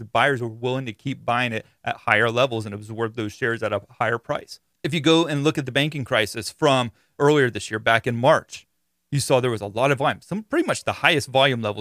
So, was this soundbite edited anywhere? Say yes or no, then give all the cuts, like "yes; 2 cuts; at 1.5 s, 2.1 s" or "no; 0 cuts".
no; 0 cuts